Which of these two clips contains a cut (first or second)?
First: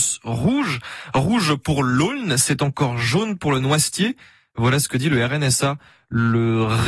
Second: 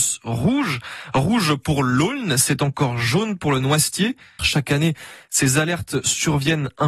second